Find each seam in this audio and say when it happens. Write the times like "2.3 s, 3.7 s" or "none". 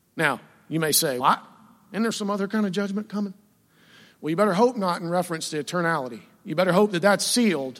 1.2 s